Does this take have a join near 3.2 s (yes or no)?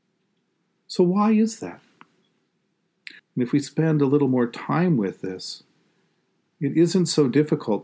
yes